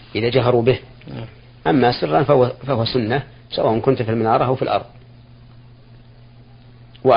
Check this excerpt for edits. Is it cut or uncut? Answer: uncut